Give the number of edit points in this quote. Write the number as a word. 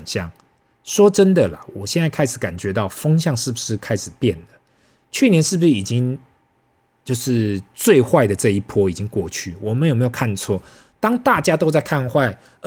zero